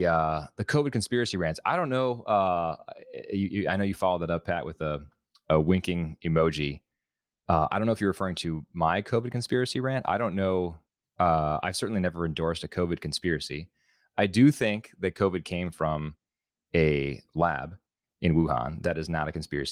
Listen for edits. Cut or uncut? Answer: uncut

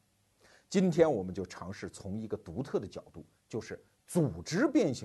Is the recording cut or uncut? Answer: uncut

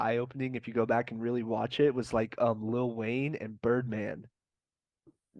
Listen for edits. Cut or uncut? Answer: uncut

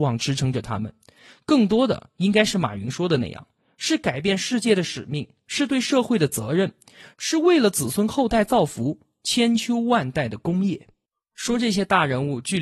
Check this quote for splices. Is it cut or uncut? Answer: uncut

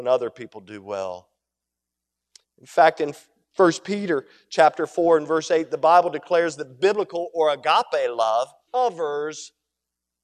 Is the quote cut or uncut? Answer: cut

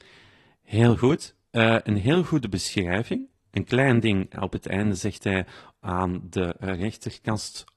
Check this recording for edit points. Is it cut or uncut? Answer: uncut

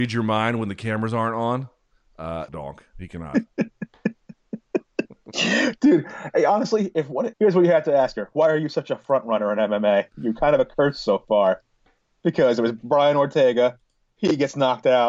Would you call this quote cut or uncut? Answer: cut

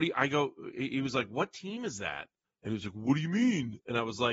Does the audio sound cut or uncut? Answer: cut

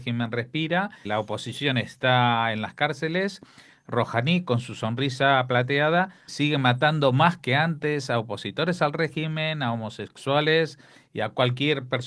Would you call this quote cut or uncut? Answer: cut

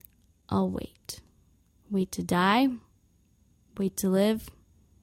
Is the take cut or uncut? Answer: uncut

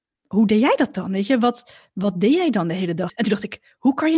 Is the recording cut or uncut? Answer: cut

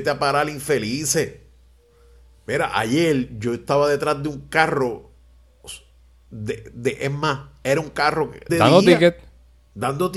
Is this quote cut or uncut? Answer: cut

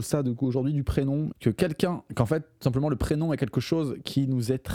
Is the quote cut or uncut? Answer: cut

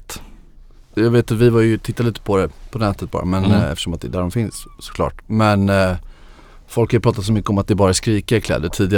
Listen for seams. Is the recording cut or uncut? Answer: cut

